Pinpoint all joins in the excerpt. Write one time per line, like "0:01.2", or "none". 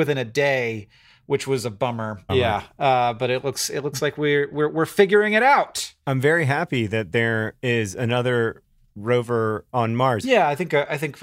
0:02.3
0:10.2